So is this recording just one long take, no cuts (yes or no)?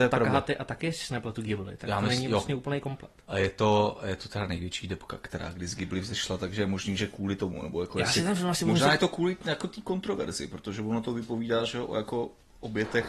yes